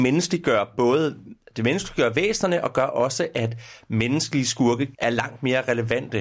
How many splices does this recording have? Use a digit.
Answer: 1